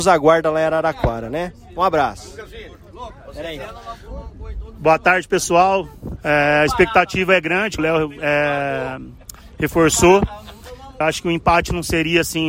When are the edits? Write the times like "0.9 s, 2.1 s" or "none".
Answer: 6.2 s, 7.8 s, 11.0 s